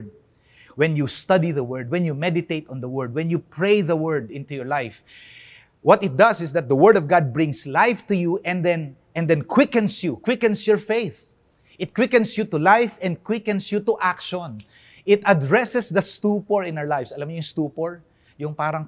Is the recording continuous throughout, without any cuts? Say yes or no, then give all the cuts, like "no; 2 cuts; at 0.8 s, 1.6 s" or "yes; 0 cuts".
yes; 0 cuts